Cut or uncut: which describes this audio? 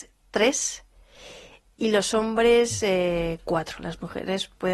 uncut